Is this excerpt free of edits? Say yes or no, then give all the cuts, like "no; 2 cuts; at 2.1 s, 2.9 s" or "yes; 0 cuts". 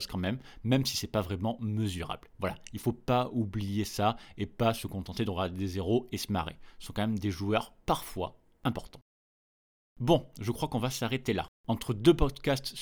no; 1 cut; at 11.6 s